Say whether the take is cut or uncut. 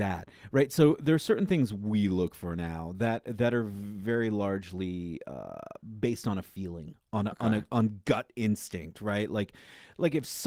uncut